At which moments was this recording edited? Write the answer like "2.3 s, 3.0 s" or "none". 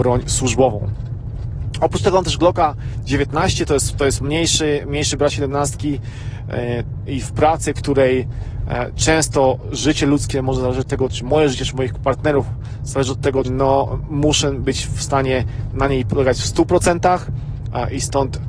7.1 s, 11.1 s, 13.4 s